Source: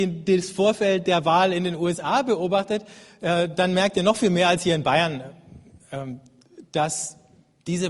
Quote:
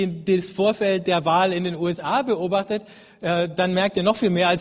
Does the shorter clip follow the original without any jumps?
yes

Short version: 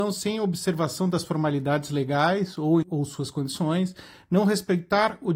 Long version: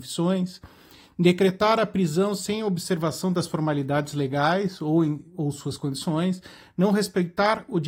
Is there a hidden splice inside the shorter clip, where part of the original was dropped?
yes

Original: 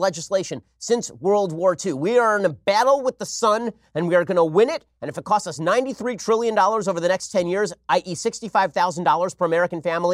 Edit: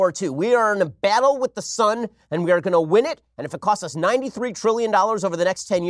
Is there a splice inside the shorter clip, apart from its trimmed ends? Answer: no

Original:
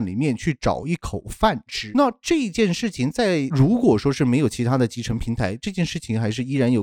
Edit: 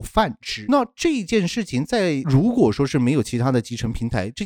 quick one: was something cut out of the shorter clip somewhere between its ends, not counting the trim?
no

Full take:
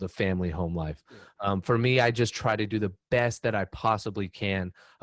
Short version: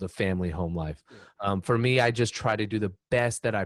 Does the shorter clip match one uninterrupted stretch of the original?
yes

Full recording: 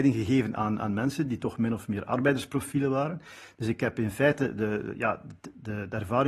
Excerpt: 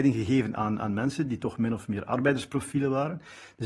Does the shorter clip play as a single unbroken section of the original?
yes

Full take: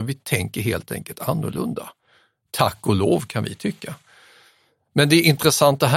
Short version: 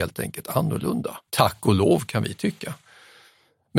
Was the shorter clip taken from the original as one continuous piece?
no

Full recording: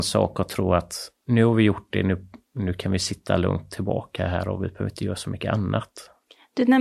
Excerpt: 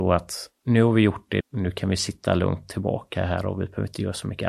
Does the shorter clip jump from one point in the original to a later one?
yes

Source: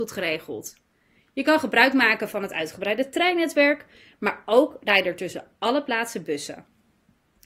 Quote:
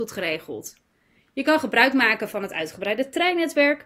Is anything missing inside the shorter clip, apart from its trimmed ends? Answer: no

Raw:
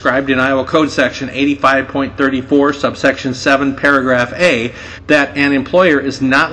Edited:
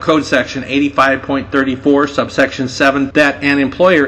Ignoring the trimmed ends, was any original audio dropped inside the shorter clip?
yes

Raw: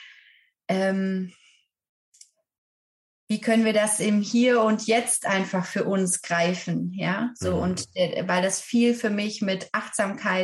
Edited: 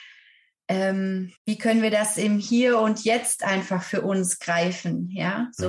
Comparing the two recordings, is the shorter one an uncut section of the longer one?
no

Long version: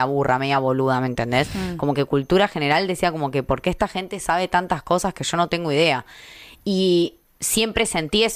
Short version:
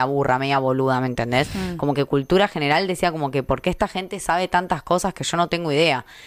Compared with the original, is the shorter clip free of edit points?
yes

